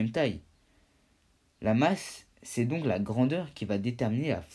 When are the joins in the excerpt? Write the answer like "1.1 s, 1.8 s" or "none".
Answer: 2.3 s